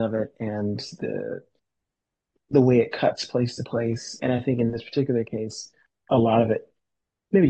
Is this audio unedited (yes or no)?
no